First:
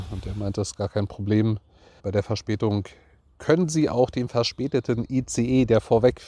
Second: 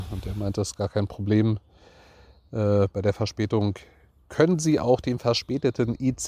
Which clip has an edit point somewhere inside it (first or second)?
first